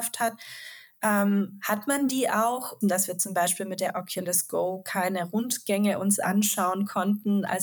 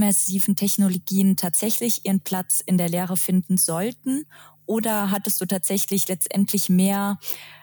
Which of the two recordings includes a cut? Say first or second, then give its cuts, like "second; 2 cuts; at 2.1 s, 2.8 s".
first; 1 cut; at 2.8 s